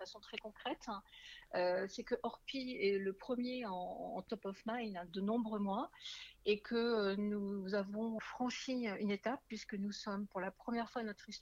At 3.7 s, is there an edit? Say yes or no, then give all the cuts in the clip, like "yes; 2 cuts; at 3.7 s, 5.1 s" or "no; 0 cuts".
no; 2 cuts; at 5.1 s, 8.2 s